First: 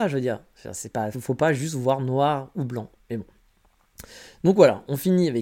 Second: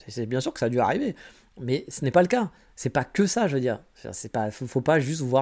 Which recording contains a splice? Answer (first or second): first